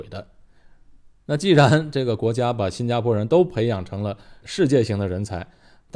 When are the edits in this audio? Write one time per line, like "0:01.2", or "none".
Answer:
none